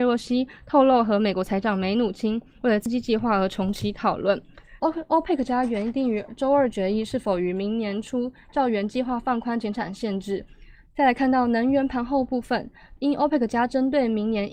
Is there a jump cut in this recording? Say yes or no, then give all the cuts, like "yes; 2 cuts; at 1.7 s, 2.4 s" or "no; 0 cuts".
yes; 3 cuts; at 4.8 s, 10.9 s, 13.0 s